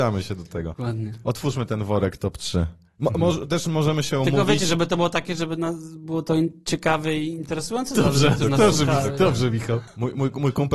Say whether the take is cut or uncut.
cut